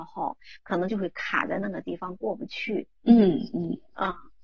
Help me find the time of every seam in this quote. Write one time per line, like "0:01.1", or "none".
0:02.9